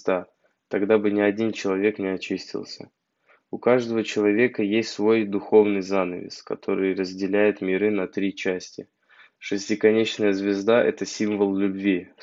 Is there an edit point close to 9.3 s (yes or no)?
yes